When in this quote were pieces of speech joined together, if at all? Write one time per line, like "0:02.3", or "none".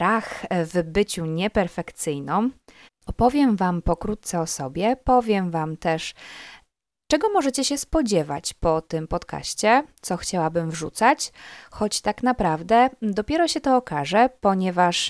0:02.9